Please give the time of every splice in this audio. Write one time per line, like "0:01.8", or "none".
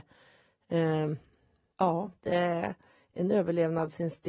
0:01.7